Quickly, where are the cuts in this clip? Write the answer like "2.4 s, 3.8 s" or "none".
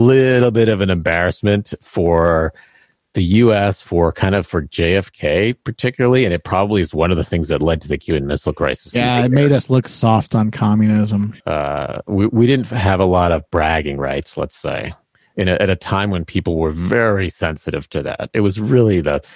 11.4 s